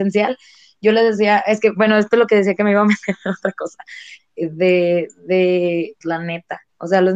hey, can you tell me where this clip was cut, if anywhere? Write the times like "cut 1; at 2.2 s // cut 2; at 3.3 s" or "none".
cut 1; at 4.2 s // cut 2; at 6.0 s